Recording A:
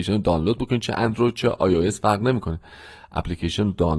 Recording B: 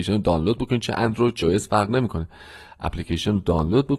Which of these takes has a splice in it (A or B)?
B